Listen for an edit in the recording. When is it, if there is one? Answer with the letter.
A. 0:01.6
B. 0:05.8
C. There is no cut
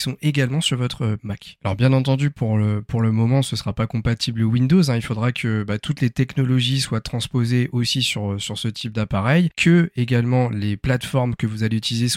C